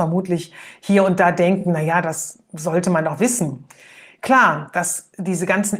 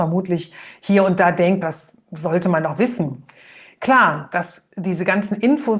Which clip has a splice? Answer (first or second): second